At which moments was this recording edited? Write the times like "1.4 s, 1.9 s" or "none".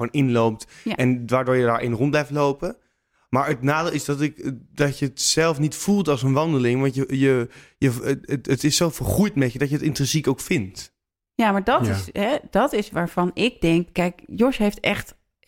13.9 s